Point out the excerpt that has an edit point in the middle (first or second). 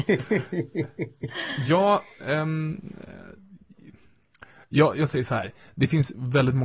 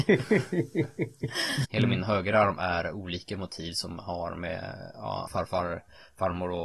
second